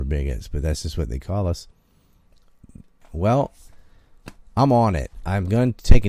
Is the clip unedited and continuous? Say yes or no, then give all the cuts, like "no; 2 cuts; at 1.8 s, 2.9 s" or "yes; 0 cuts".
no; 1 cut; at 3.0 s